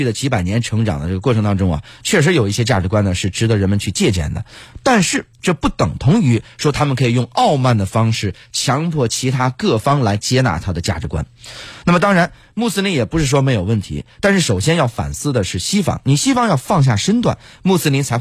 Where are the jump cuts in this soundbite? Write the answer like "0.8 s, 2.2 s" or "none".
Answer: 5.3 s, 11.8 s